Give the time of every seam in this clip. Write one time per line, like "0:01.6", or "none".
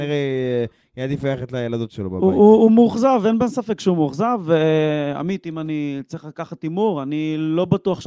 none